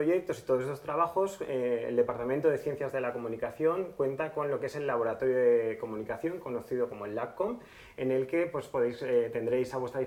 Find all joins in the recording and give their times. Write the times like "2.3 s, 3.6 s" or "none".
none